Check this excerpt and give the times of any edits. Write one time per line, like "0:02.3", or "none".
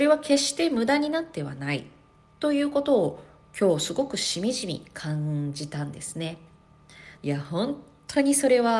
0:07.2